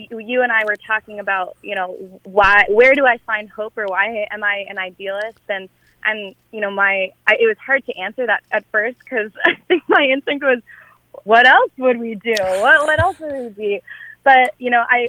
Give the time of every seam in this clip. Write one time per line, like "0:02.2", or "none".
0:11.3